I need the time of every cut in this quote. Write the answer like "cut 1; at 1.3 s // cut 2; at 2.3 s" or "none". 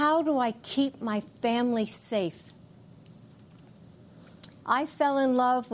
cut 1; at 4.6 s